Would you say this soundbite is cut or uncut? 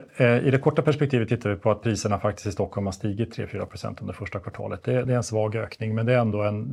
uncut